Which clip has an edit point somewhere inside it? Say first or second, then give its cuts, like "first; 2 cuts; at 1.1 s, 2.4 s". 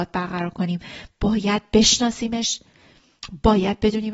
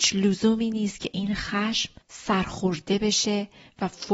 second; 1 cut; at 2.0 s